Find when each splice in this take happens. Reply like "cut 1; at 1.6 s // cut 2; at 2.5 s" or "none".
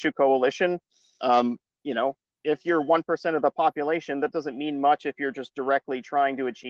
none